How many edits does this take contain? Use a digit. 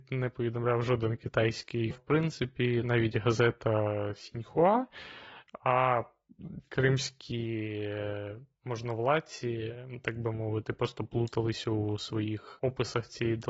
1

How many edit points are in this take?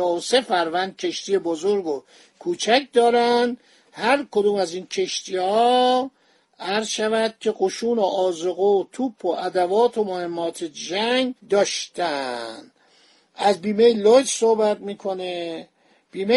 1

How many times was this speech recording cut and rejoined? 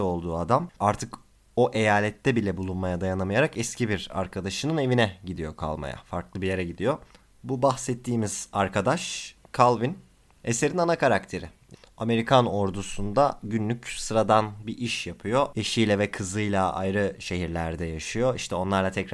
1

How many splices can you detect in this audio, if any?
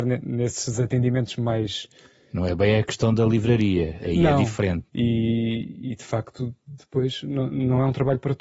1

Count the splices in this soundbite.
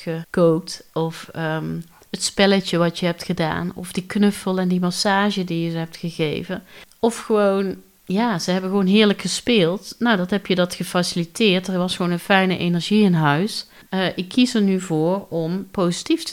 1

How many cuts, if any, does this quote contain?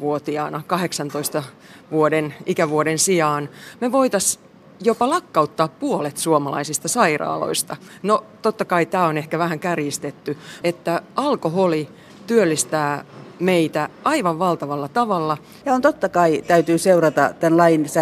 2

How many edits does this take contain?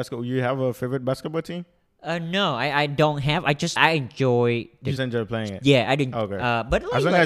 2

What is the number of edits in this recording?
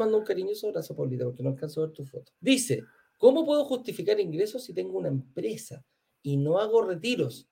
1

